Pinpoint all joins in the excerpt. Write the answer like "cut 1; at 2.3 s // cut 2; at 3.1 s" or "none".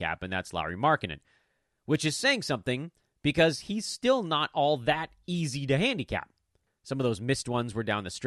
cut 1; at 6.7 s